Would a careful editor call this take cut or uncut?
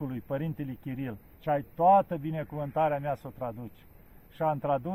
cut